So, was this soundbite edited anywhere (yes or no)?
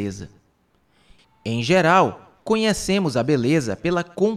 yes